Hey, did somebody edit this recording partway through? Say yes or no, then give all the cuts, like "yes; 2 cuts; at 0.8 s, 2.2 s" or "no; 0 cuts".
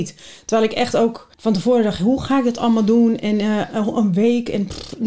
yes; 1 cut; at 1.3 s